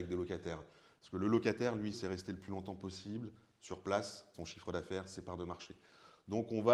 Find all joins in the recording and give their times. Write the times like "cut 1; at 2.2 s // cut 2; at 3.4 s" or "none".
cut 1; at 1.9 s // cut 2; at 4.3 s